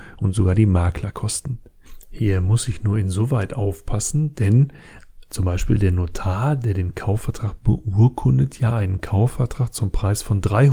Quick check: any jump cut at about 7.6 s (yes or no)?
yes